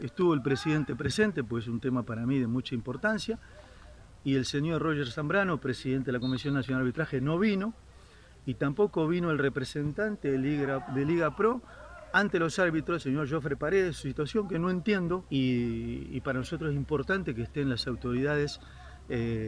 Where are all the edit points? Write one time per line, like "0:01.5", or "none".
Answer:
0:15.3